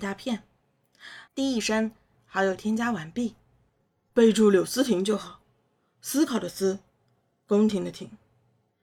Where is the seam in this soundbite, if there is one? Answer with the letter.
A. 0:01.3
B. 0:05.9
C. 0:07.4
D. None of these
A